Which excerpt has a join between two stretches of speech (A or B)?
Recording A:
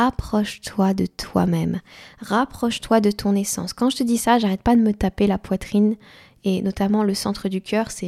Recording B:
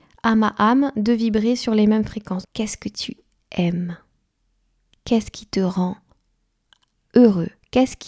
B